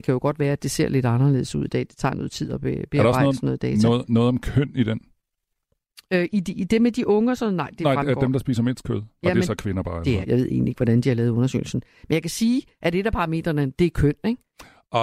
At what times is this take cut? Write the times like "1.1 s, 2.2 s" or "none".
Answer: 10.2 s